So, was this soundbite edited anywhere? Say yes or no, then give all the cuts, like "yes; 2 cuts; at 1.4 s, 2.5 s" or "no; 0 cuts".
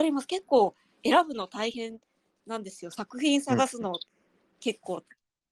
no; 0 cuts